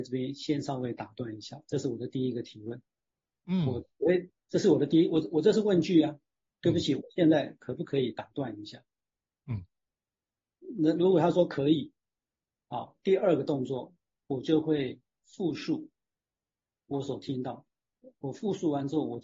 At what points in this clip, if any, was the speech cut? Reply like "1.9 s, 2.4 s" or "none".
none